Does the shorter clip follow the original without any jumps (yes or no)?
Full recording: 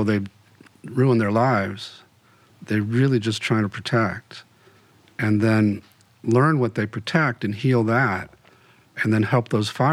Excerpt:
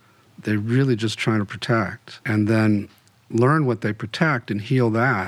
no